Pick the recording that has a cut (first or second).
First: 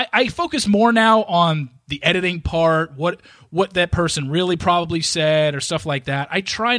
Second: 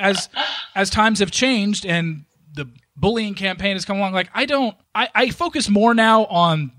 second